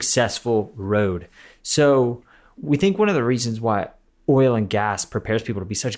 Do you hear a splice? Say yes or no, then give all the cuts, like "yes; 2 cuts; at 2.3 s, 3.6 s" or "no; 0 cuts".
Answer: no; 0 cuts